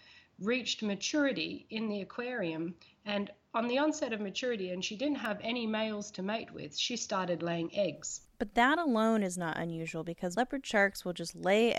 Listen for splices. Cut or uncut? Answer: cut